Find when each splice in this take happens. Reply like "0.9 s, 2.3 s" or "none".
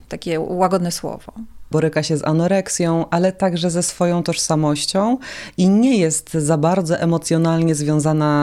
1.7 s